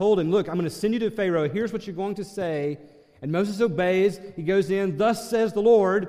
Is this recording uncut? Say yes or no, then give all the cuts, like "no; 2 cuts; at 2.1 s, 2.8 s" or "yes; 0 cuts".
yes; 0 cuts